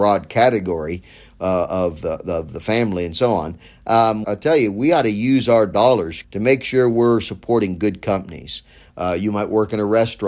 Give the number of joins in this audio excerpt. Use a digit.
3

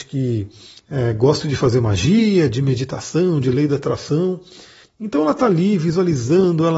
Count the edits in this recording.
2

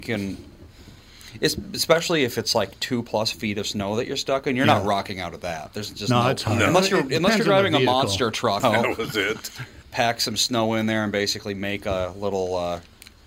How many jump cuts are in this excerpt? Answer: 2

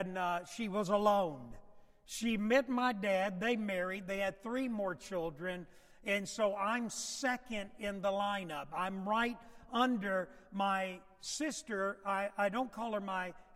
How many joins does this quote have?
0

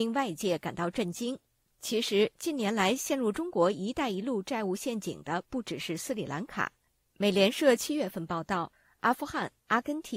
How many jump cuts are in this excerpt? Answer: 0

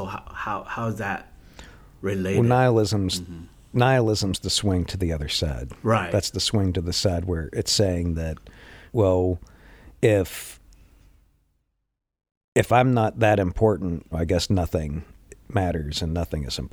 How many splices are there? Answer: 2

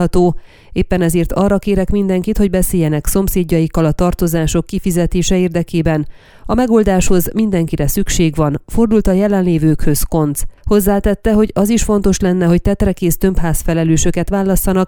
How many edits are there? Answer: 0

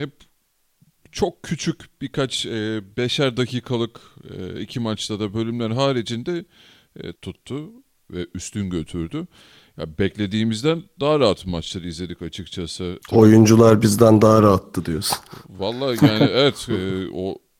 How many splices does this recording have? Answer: 2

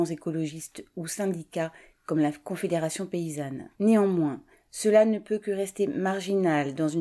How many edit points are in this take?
1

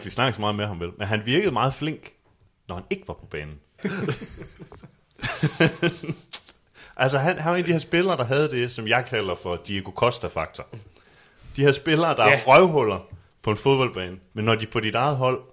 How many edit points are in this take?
2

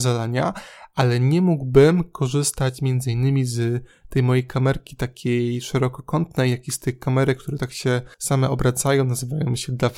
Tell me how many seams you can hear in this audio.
1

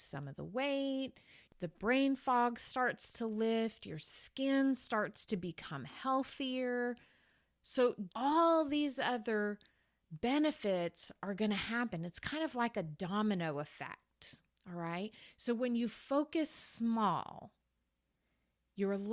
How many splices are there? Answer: 1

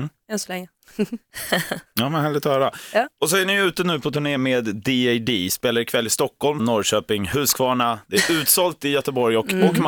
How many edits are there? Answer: 1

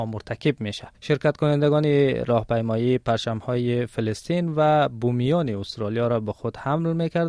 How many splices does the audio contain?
1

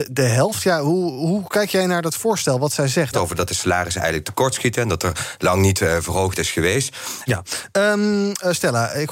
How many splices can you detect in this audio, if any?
2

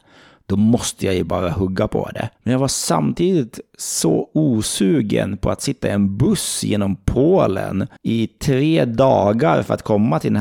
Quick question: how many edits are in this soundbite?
2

